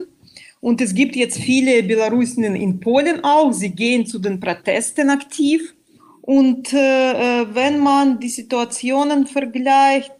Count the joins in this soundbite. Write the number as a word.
zero